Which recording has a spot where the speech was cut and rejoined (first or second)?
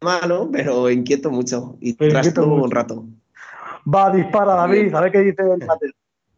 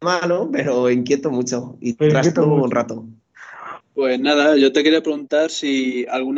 second